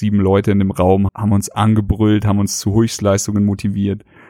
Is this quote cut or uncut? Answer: cut